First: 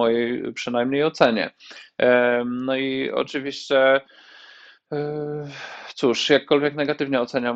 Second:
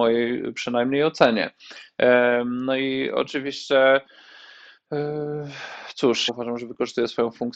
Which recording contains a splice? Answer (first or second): second